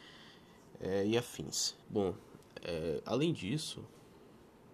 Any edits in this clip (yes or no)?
yes